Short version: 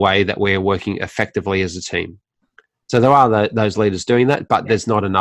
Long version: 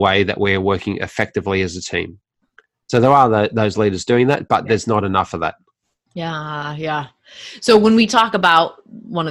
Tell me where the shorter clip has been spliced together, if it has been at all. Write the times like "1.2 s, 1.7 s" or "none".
none